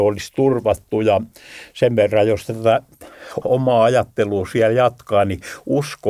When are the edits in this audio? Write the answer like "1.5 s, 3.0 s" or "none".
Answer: 3.4 s